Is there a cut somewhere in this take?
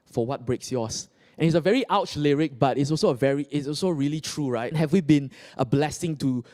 yes; 1 cut; at 4.7 s

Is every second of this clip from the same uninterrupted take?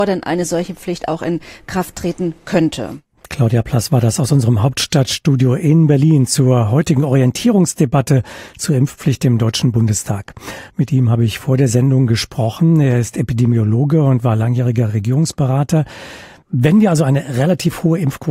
no; 1 cut; at 10.7 s

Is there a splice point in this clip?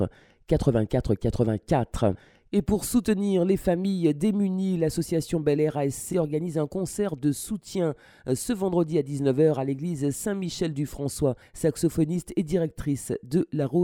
yes; 2 cuts; at 6.1 s, 11.4 s

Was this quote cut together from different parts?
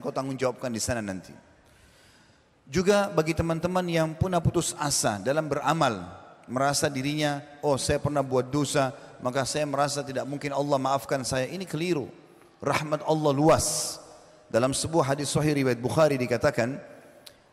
no; 0 cuts

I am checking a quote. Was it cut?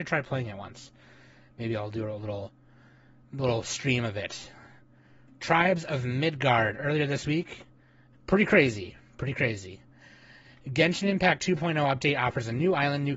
yes; 1 cut; at 8.1 s

